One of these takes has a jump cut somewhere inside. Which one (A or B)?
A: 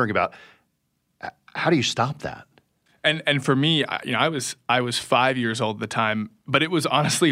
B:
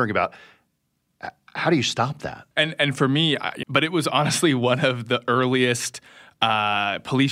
B